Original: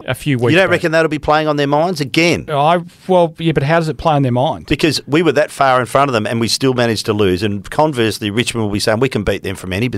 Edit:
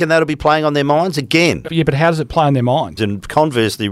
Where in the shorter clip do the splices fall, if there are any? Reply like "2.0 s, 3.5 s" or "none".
1.7 s, 3.0 s